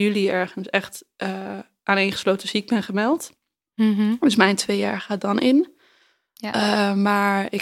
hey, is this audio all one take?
yes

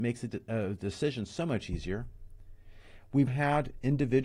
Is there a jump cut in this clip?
yes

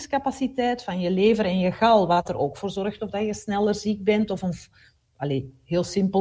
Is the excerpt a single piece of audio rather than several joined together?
yes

